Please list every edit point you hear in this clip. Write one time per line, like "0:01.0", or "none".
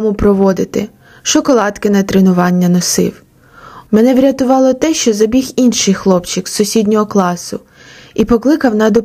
0:03.9